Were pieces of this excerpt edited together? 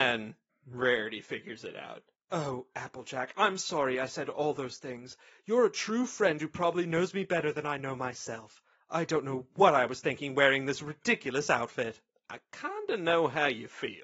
no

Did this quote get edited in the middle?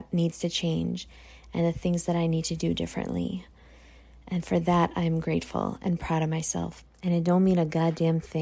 yes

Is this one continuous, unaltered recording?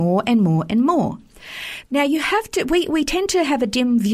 yes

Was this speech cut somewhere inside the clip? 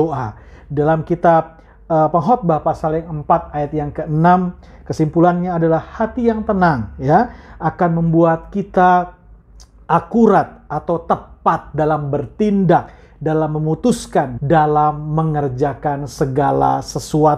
yes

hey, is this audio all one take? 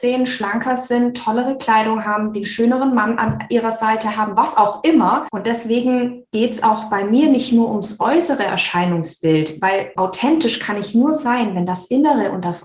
no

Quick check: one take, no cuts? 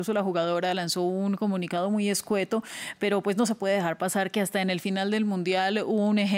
yes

